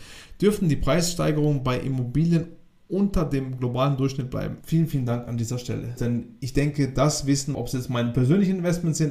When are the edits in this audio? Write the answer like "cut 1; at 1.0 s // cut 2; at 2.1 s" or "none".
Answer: cut 1; at 4.6 s // cut 2; at 6.0 s // cut 3; at 7.5 s